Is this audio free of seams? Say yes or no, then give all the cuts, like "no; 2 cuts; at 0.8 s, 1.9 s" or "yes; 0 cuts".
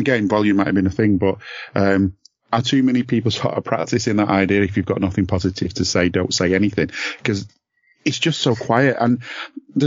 yes; 0 cuts